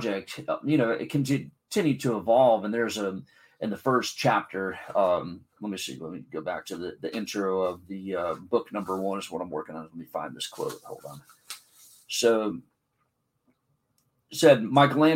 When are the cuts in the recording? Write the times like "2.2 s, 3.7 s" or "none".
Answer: none

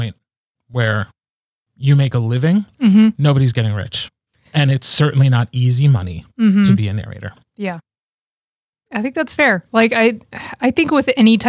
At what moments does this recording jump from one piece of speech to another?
none

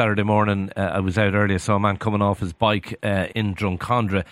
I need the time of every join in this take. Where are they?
3.3 s

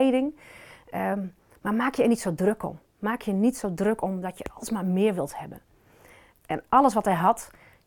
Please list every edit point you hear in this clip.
6.3 s

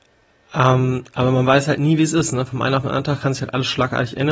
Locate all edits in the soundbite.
none

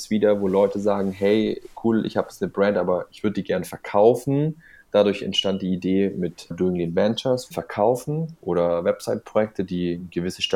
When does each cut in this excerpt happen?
6.5 s, 7.5 s

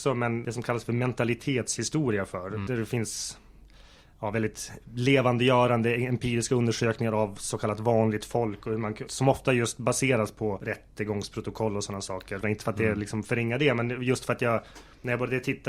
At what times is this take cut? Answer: 9.1 s, 12.4 s

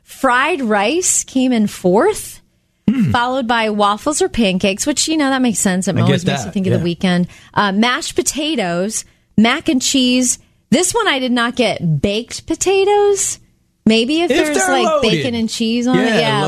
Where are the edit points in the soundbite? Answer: none

